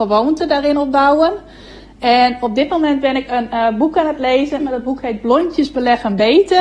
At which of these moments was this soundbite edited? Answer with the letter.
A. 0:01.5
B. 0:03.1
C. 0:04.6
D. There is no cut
C